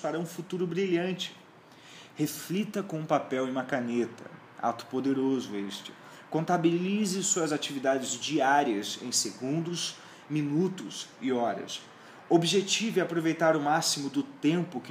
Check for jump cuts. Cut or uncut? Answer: uncut